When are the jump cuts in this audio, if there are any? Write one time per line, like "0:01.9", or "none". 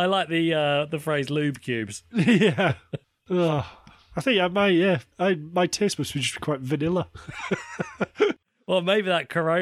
none